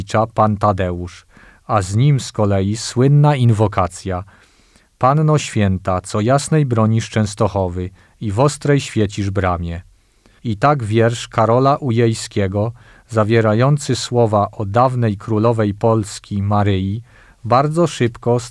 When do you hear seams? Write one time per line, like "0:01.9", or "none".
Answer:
0:10.4